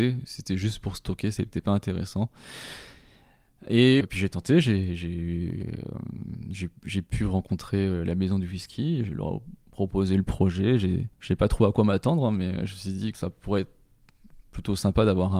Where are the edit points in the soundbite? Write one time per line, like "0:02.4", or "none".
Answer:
0:04.0
0:11.1
0:13.1